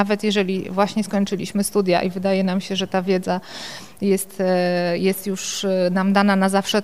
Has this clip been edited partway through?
no; 0 cuts

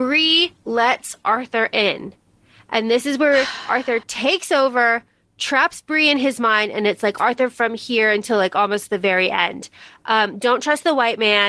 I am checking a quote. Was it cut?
no; 0 cuts

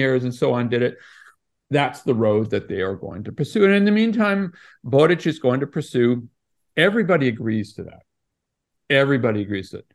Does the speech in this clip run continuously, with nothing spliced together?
no; 1 cut; at 6.7 s

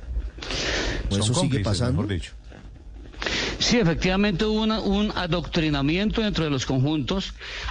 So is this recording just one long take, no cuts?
no; 1 cut; at 1.1 s

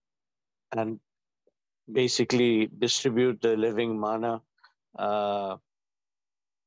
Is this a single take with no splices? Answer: yes; 0 cuts

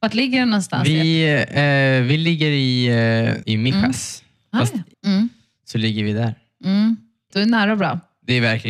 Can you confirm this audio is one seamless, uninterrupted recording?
no; 3 cuts; at 3.4 s, 4.9 s, 7.3 s

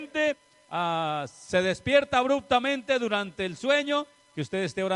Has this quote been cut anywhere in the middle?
no; 0 cuts

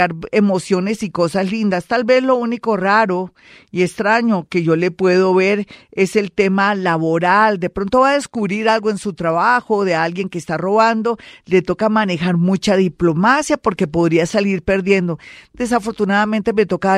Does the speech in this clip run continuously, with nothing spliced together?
yes; 0 cuts

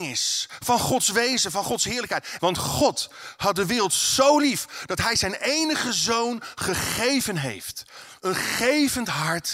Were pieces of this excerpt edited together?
yes; 2 cuts; at 2.4 s, 8.2 s

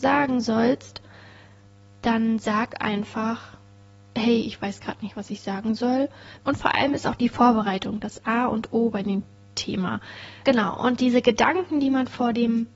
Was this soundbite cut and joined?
yes; 2 cuts; at 6.4 s, 10.4 s

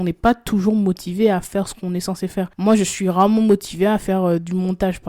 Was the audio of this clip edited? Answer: no; 0 cuts

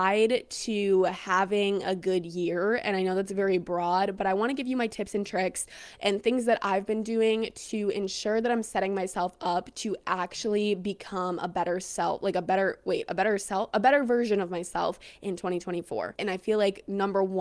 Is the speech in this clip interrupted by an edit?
yes; 1 cut; at 16.2 s

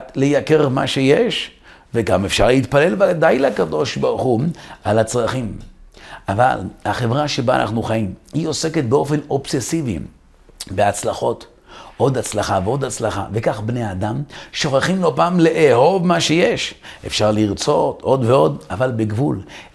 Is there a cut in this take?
no; 0 cuts

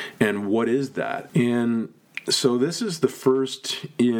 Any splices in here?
yes; 1 cut; at 1.3 s

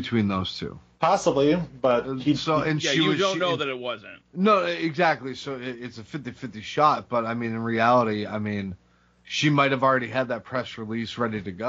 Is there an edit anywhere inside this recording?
no; 0 cuts

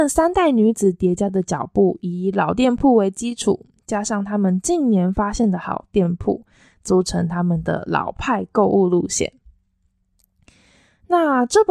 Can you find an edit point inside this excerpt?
no; 0 cuts

